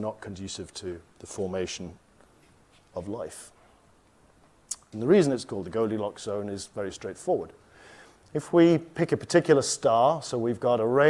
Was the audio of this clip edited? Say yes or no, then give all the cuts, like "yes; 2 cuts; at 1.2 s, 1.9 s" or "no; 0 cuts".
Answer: yes; 1 cut; at 4.9 s